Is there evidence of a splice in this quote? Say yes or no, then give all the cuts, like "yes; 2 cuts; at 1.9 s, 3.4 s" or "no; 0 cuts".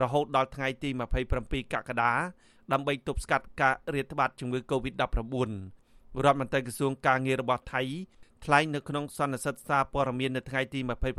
no; 0 cuts